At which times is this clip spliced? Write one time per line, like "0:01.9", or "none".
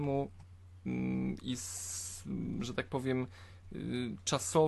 none